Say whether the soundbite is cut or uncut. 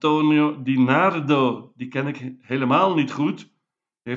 uncut